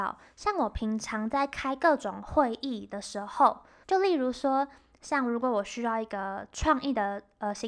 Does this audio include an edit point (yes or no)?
yes